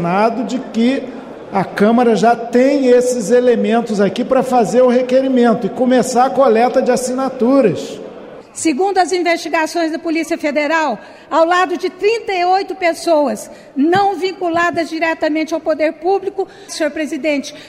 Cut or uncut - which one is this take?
cut